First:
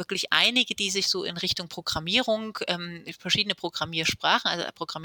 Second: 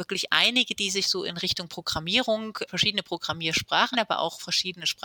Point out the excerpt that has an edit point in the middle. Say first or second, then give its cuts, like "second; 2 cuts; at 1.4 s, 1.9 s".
second; 2 cuts; at 2.7 s, 3.9 s